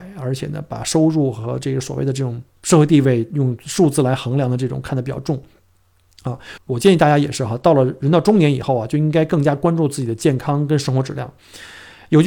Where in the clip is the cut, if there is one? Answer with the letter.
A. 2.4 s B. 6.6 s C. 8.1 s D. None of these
B